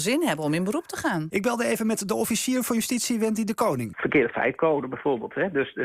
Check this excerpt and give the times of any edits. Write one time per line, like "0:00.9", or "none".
0:01.3
0:03.9